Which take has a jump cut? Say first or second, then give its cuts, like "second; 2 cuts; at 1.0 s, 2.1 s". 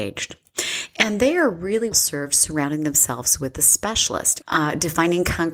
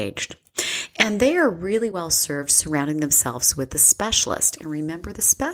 first; 2 cuts; at 1.9 s, 4.4 s